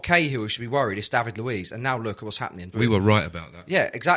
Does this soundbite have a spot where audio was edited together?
yes; 1 cut; at 2.7 s

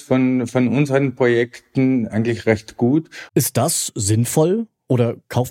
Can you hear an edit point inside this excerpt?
yes; 1 cut; at 3.3 s

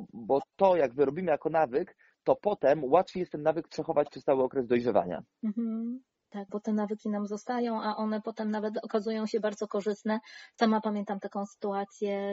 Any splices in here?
yes; 1 cut; at 6.5 s

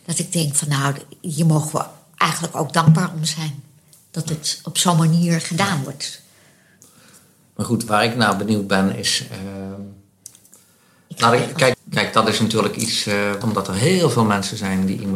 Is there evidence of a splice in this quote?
yes; 3 cuts; at 7.9 s, 11.7 s, 13.4 s

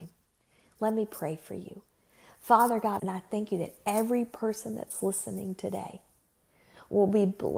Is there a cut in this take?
yes; 1 cut; at 3.0 s

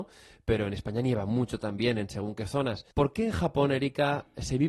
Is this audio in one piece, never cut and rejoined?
no; 1 cut; at 2.9 s

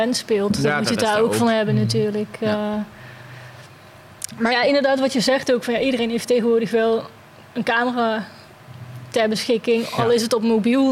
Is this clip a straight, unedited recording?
yes; 0 cuts

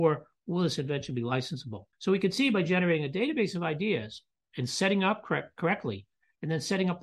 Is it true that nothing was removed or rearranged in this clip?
no; 1 cut; at 1.9 s

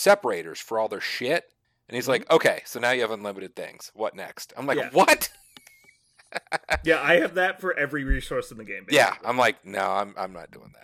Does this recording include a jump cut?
no; 0 cuts

